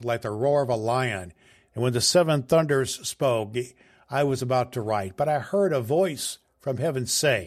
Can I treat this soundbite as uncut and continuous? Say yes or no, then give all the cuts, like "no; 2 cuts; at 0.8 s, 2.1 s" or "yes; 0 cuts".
no; 1 cut; at 1.7 s